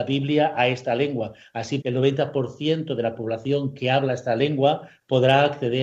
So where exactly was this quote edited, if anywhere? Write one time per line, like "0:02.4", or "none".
0:01.8